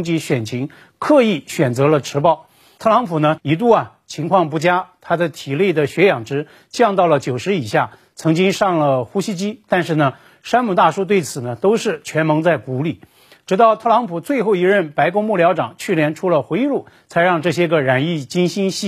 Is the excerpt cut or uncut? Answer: cut